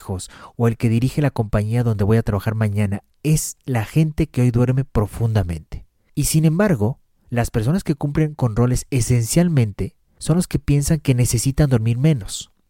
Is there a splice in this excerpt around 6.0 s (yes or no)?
no